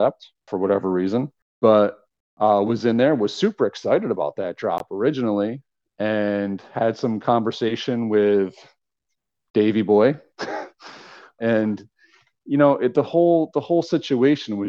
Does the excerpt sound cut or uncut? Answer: cut